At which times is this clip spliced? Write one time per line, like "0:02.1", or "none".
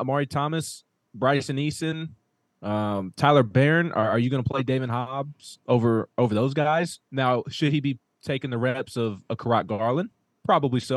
none